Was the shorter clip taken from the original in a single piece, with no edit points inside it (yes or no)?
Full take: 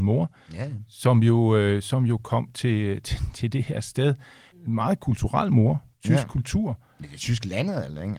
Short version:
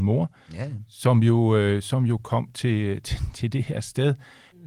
yes